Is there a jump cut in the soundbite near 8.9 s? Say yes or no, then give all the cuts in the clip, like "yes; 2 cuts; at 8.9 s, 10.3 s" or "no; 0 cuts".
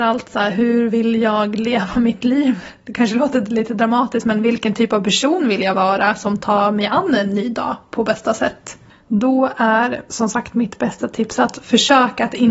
yes; 1 cut; at 8.9 s